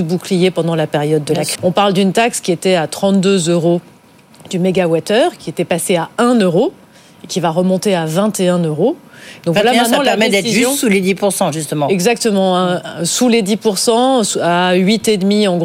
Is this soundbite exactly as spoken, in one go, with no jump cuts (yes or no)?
no